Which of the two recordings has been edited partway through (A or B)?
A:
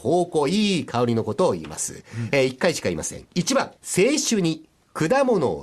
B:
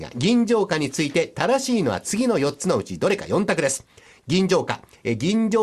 A